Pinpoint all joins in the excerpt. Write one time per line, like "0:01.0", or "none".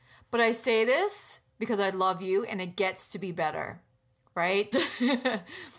0:04.7